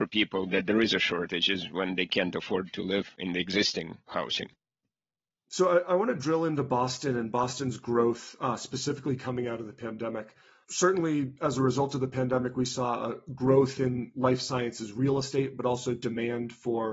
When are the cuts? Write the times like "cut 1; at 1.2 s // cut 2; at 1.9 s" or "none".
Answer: none